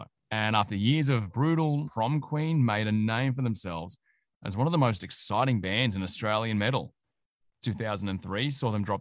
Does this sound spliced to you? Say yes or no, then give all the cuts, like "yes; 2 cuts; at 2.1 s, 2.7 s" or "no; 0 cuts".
yes; 1 cut; at 1.8 s